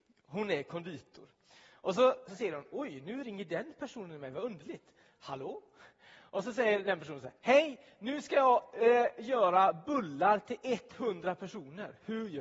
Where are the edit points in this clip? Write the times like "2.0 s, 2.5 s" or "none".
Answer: 2.3 s